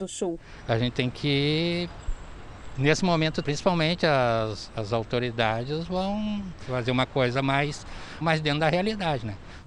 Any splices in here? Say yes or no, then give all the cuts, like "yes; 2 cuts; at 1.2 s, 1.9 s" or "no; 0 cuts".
yes; 2 cuts; at 3.4 s, 8.2 s